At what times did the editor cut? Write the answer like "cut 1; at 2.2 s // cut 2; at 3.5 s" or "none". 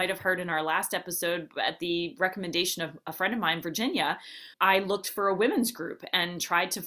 cut 1; at 4.5 s